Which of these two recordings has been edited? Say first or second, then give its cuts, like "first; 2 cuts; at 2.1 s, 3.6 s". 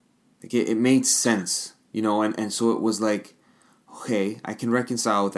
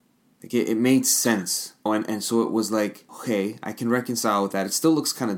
second; 2 cuts; at 1.9 s, 3.1 s